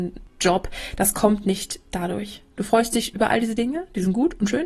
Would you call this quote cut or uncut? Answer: uncut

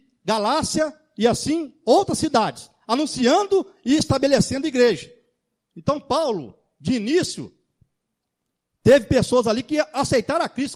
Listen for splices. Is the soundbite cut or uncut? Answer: uncut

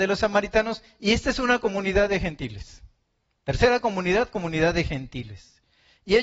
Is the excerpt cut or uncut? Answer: uncut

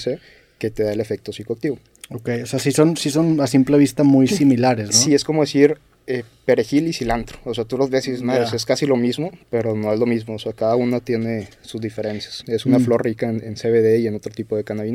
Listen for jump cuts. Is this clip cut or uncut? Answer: cut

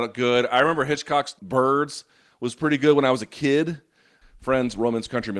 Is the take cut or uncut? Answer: cut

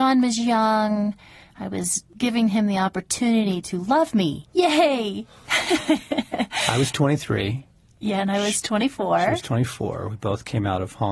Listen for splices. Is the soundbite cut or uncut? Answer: uncut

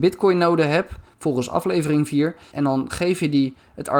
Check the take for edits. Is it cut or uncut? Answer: cut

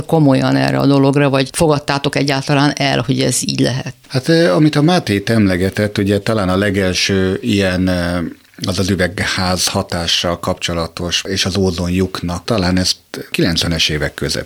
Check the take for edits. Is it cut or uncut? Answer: cut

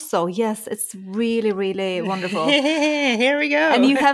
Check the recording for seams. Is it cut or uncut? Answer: uncut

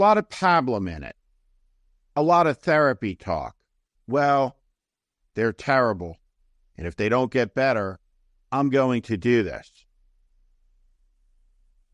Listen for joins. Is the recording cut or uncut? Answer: cut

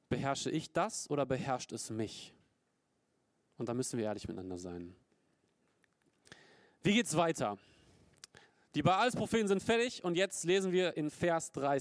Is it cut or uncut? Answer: uncut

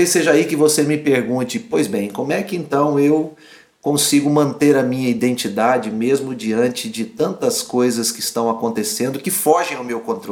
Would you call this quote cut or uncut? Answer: uncut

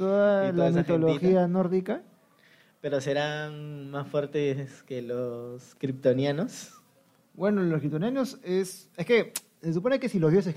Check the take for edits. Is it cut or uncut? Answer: uncut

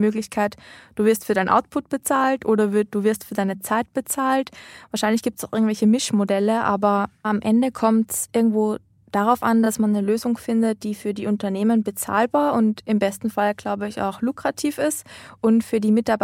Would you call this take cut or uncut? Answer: uncut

